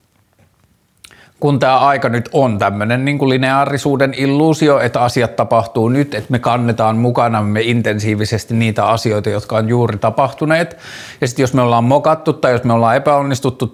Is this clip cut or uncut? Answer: uncut